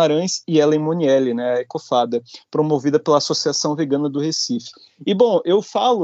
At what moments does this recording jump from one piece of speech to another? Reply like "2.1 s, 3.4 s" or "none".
none